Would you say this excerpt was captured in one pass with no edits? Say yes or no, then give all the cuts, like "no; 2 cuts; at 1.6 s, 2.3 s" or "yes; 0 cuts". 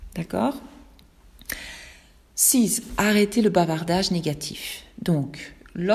yes; 0 cuts